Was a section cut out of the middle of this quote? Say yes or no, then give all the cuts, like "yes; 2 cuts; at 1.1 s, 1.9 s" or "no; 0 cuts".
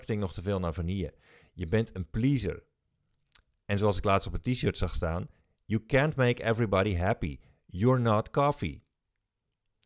no; 0 cuts